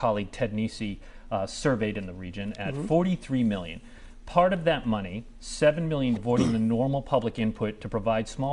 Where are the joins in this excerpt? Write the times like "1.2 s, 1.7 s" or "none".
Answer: 6.2 s